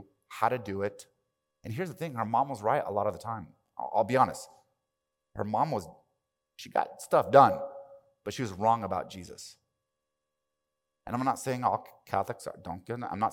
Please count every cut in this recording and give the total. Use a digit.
0